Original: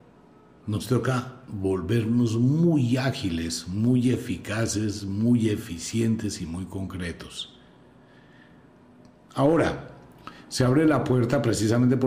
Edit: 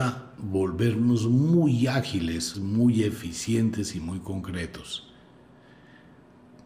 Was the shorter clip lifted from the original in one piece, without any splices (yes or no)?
no